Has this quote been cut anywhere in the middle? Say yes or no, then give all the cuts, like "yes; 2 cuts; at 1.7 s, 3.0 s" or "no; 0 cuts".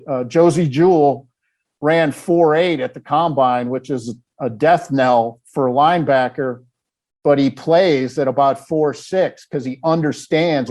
no; 0 cuts